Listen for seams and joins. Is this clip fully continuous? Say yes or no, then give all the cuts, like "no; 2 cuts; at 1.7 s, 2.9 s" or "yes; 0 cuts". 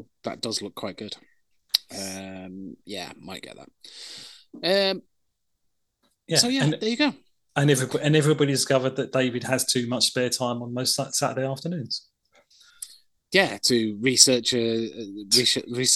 yes; 0 cuts